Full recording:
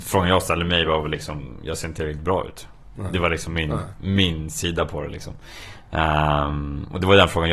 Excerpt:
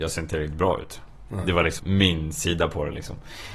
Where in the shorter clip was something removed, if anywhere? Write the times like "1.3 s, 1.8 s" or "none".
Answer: 1.8 s

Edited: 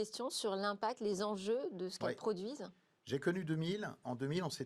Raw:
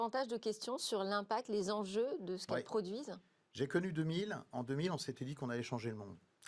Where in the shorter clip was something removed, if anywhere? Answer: none

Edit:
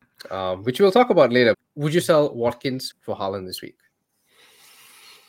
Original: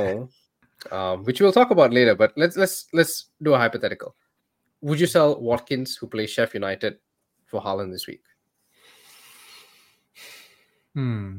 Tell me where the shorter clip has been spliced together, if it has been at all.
1.5 s, 2.9 s

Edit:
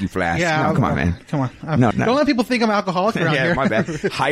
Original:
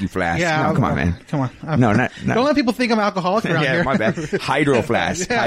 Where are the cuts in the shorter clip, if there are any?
1.9 s

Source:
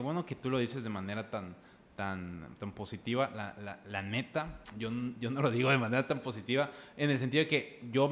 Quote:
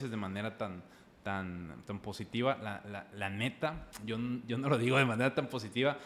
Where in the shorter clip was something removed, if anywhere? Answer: none

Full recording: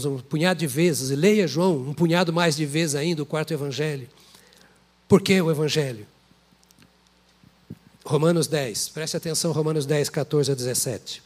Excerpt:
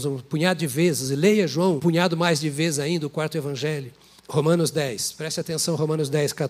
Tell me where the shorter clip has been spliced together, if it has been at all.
1.8 s, 4.2 s

